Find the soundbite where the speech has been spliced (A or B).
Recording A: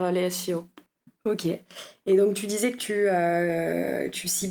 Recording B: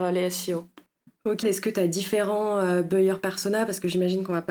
B